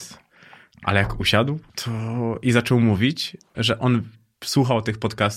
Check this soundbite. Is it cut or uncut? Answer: cut